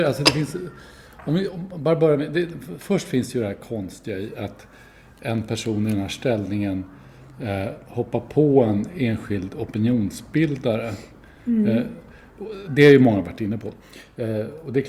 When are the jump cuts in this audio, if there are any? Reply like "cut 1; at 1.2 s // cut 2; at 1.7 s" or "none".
none